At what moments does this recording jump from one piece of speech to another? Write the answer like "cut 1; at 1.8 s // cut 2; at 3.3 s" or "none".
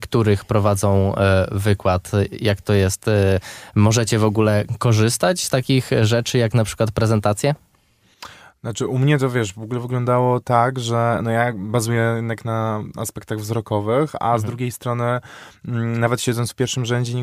none